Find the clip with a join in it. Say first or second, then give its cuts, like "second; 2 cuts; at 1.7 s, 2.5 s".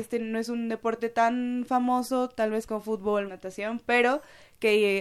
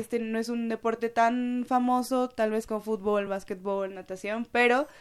first; 1 cut; at 3.3 s